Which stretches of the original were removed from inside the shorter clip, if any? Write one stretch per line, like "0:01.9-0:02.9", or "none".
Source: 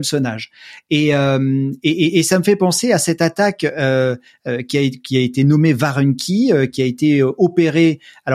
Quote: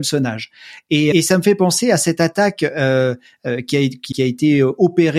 0:01.1-0:02.1
0:05.1-0:06.7